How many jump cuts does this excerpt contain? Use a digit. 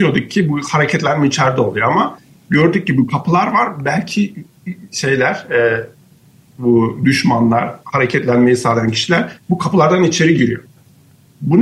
0